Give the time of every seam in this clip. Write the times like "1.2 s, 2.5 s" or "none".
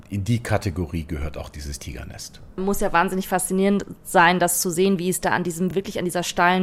none